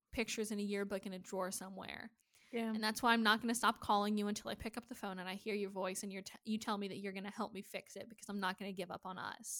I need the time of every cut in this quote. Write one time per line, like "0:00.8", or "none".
none